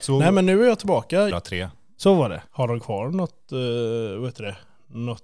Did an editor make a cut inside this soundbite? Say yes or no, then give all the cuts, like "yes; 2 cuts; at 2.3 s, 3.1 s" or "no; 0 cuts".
yes; 2 cuts; at 1.3 s, 2.5 s